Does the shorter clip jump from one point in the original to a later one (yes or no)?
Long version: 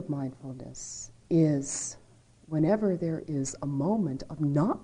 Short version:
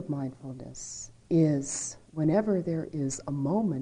yes